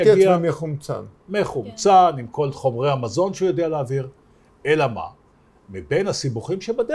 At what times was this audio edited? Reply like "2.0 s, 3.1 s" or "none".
none